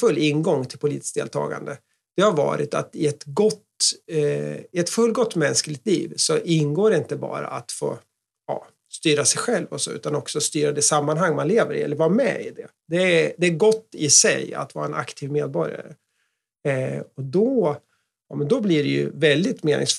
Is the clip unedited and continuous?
yes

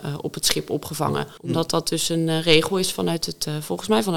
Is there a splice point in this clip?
yes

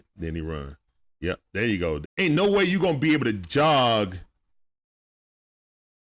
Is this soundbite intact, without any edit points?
no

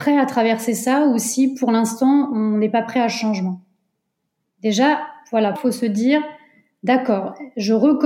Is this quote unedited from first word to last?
no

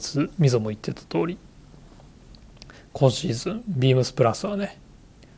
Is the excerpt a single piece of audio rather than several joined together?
yes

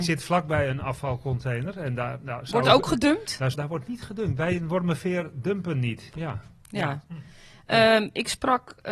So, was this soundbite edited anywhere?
yes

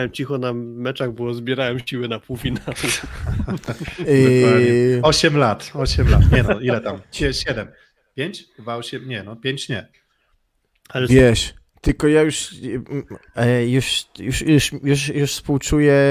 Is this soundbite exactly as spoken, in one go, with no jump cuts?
no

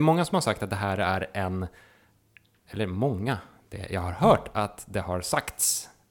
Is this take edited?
no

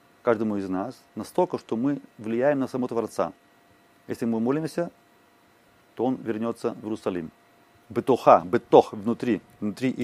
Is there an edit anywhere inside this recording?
yes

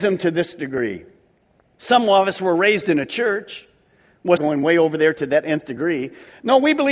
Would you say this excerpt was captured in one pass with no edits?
no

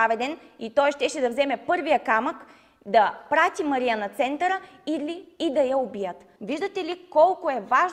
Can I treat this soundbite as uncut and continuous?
no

